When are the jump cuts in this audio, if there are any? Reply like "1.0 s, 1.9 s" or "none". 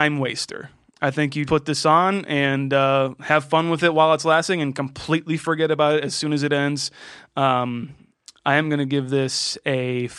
1.5 s